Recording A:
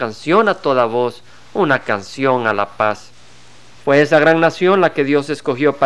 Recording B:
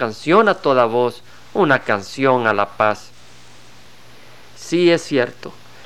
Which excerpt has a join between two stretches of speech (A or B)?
A